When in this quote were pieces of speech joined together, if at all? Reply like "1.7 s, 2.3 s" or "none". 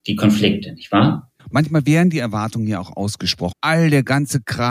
1.4 s, 3.5 s